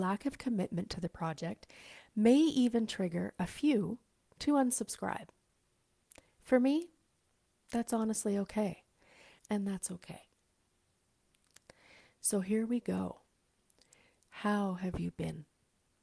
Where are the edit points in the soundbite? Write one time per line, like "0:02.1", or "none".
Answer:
0:09.4
0:14.2